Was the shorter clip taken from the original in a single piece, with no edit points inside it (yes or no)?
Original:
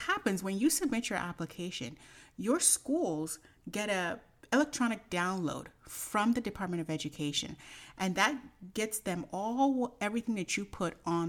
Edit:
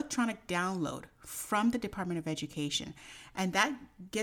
yes